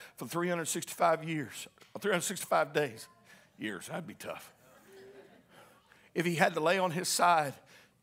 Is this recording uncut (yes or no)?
yes